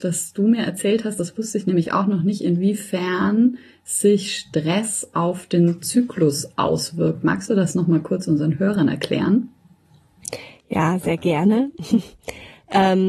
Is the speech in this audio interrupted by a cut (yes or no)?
no